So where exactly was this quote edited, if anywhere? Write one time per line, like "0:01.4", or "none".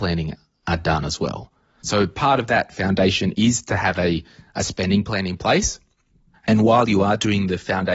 0:01.8
0:06.3